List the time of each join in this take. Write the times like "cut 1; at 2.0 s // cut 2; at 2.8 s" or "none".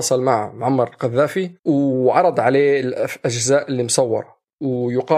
cut 1; at 1.6 s